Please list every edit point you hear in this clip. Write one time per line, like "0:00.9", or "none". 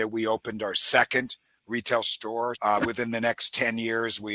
0:02.5